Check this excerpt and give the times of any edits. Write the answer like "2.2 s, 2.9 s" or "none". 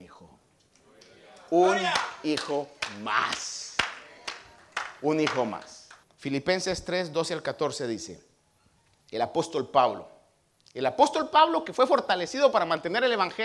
6.0 s